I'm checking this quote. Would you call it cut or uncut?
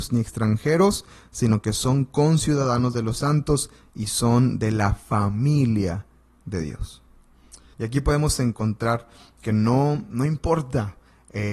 cut